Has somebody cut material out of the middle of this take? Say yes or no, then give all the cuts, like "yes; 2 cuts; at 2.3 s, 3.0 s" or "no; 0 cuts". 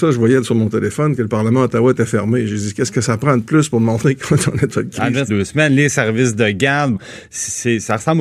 yes; 2 cuts; at 5.3 s, 7.0 s